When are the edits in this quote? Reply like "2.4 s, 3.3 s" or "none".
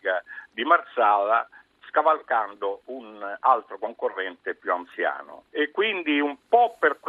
5.5 s